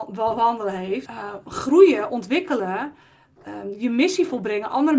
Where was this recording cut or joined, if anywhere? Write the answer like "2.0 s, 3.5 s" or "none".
1.0 s